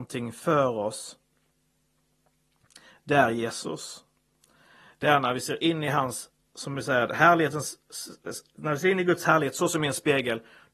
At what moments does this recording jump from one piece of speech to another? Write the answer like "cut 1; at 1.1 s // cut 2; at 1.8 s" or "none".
none